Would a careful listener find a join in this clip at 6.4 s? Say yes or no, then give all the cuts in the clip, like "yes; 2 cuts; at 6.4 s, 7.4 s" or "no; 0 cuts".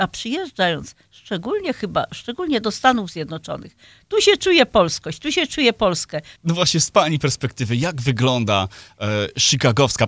yes; 1 cut; at 6.4 s